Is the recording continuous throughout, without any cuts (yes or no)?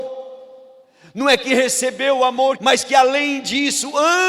no